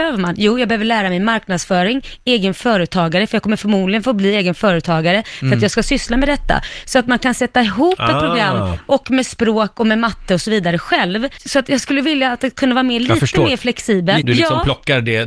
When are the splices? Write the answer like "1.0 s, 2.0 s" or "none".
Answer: 14.2 s